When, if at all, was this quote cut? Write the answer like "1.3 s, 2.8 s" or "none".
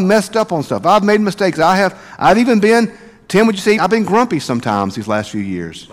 3.8 s